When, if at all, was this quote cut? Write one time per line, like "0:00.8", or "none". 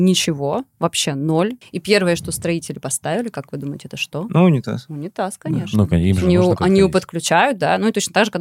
0:01.6